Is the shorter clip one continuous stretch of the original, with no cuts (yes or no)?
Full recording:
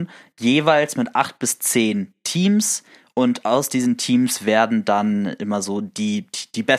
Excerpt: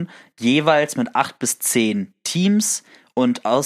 yes